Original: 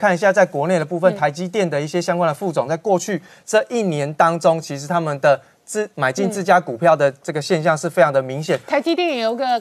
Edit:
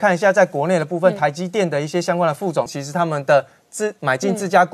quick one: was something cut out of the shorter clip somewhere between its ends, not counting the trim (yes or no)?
yes